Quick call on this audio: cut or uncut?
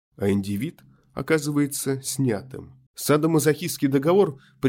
cut